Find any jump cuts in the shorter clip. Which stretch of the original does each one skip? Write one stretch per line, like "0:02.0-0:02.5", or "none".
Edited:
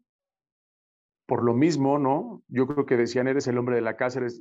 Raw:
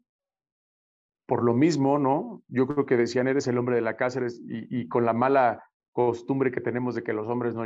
none

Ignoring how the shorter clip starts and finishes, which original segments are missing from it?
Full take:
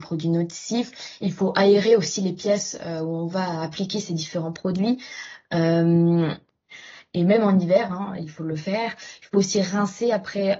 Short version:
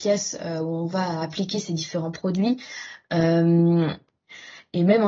none

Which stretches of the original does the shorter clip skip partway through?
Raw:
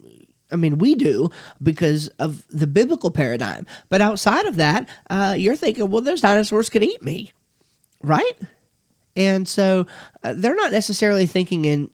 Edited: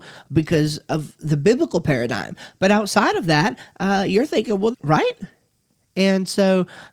0:06.0-0:07.9

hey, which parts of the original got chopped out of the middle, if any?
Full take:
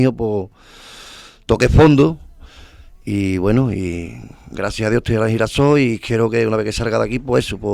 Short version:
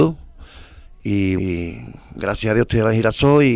0:03.4-0:03.7

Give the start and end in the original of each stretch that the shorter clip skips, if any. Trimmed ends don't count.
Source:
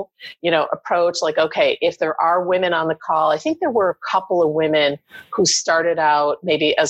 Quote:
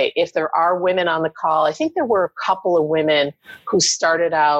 none

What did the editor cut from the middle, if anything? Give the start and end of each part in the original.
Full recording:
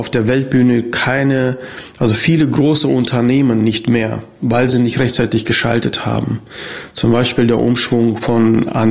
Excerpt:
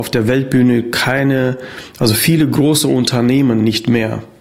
none

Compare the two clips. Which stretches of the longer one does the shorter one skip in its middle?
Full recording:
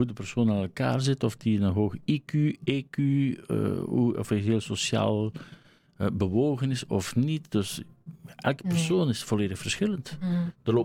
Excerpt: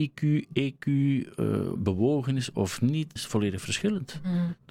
0:03.9-0:06.1
0:07.5-0:09.1

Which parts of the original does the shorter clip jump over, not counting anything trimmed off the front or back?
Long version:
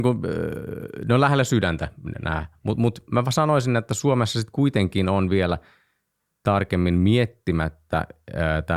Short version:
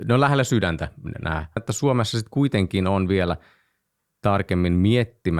0:02.6-0:03.8

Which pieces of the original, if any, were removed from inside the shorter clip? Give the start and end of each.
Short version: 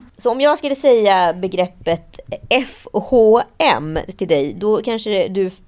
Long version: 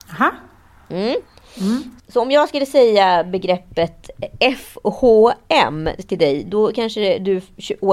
none

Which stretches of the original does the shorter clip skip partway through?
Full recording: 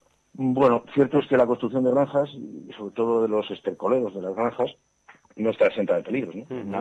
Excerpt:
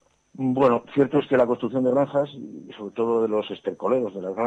none

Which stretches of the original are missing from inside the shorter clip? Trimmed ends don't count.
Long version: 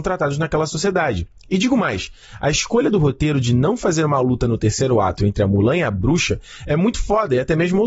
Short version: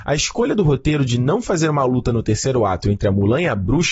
none

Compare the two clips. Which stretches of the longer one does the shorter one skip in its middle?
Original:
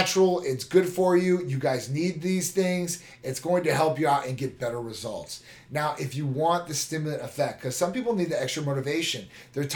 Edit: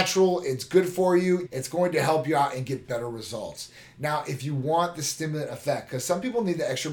0:01.5-0:03.2

